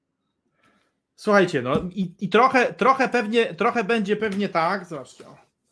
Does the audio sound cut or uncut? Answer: uncut